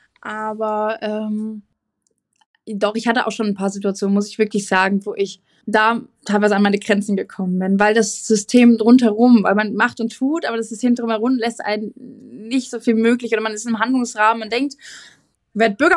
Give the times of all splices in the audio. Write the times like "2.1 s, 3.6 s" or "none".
none